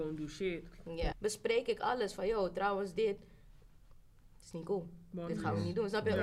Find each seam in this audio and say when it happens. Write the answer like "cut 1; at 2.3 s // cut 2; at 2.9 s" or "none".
cut 1; at 1.1 s